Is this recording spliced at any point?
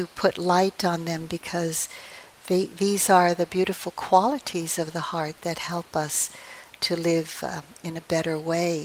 no; 0 cuts

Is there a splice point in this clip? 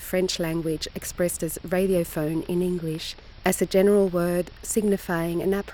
no; 0 cuts

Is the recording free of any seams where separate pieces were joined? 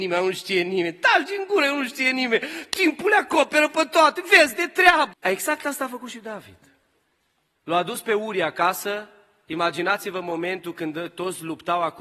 no; 2 cuts; at 5.1 s, 7.6 s

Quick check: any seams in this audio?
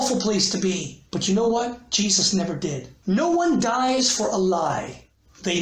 yes; 2 cuts; at 1.1 s, 3.0 s

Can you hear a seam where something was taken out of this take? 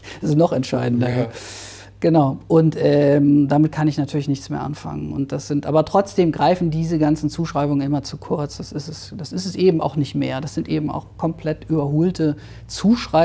no; 0 cuts

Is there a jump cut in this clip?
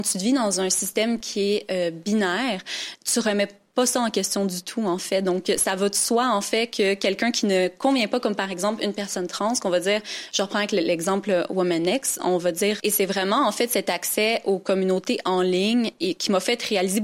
yes; 1 cut; at 12.8 s

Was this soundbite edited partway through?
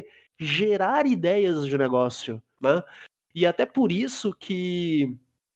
yes; 1 cut; at 2.6 s

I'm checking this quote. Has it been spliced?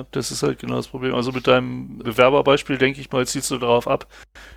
yes; 1 cut; at 2.0 s

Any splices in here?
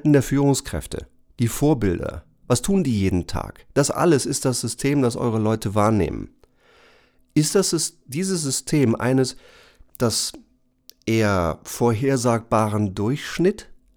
no; 0 cuts

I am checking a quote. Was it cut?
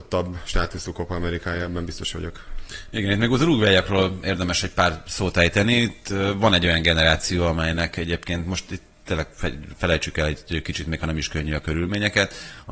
no; 0 cuts

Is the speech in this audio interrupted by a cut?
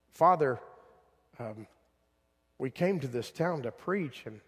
no; 0 cuts

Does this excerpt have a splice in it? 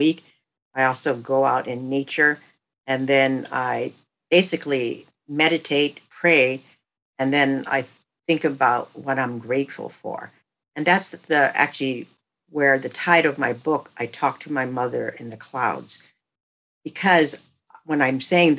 no; 0 cuts

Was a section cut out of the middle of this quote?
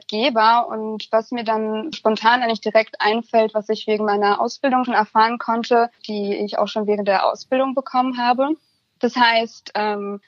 yes; 3 cuts; at 1.9 s, 4.9 s, 6.0 s

